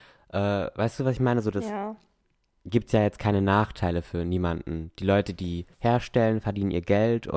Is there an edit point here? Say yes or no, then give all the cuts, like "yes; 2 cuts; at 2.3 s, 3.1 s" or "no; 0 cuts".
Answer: yes; 1 cut; at 5.7 s